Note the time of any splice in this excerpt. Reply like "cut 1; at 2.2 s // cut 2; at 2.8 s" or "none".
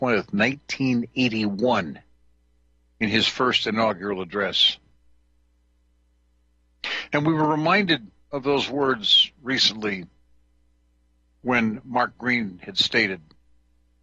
none